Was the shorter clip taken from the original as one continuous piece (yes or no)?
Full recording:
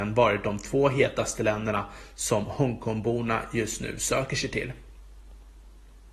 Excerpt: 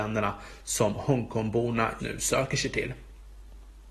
no